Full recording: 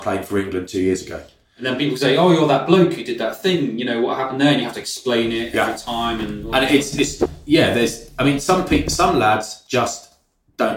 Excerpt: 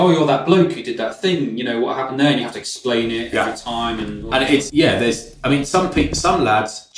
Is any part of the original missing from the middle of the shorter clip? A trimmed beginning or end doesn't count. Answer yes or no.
yes